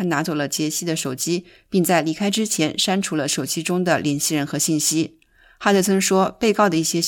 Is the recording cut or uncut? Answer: uncut